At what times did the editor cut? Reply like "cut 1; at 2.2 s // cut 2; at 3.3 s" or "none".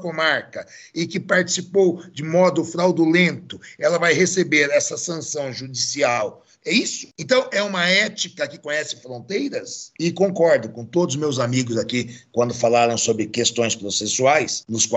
cut 1; at 6.6 s // cut 2; at 10.0 s